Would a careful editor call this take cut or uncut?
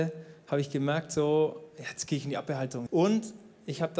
cut